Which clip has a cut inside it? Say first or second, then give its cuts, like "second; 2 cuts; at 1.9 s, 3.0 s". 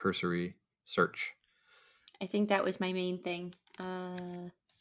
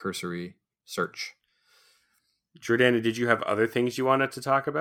first; 1 cut; at 2.1 s